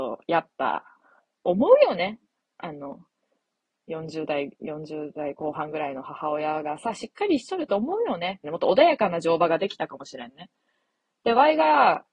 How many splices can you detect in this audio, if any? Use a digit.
1